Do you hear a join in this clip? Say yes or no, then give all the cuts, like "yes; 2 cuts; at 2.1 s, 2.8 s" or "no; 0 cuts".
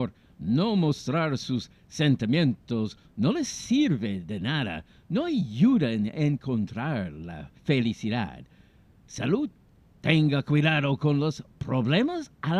yes; 1 cut; at 7.6 s